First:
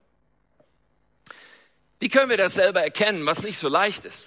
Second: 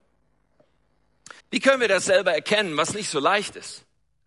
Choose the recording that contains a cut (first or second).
second